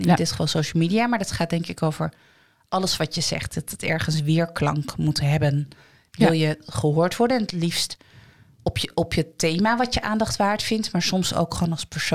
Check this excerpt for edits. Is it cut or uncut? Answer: uncut